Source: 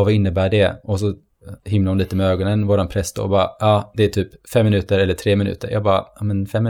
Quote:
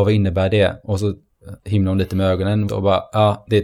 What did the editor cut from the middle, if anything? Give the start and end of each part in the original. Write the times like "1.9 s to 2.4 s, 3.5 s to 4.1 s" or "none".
2.7 s to 3.1 s